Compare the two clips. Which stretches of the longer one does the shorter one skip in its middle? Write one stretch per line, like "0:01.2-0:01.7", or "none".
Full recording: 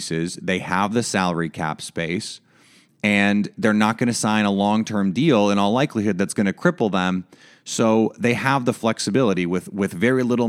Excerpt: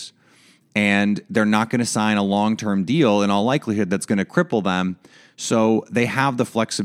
none